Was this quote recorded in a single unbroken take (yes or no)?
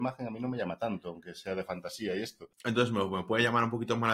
no